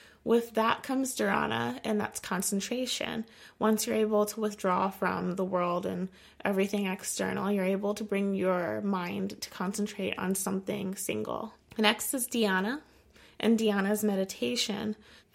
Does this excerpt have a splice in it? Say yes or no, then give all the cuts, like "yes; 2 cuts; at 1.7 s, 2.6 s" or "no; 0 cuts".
no; 0 cuts